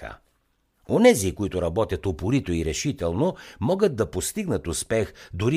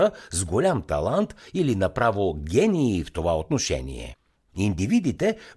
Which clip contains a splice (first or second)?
second